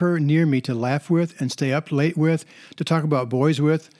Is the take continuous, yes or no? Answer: yes